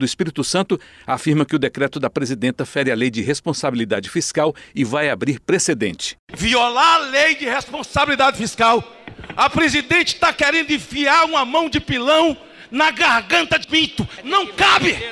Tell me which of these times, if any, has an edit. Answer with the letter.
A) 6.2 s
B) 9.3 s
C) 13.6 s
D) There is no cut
C